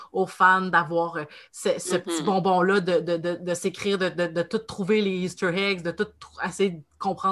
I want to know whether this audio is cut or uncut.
uncut